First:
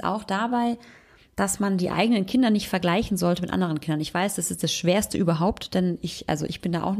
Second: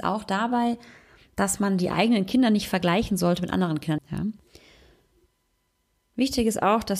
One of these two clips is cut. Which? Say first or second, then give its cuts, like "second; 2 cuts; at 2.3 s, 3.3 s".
second; 1 cut; at 4.0 s